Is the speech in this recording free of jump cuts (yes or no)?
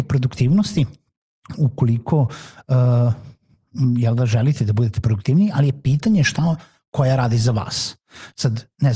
yes